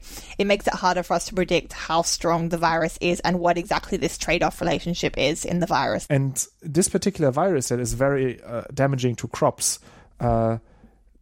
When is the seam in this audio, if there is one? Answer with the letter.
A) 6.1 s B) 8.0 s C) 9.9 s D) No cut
A